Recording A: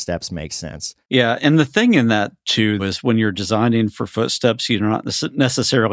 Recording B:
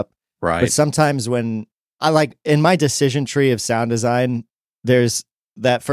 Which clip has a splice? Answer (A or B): A